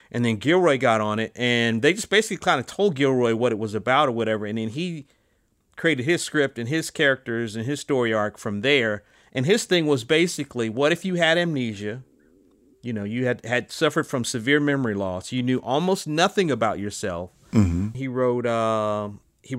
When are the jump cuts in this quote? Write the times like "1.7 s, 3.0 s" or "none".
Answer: 17.9 s